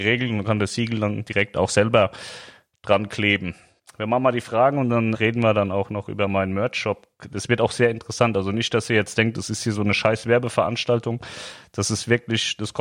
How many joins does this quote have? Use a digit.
2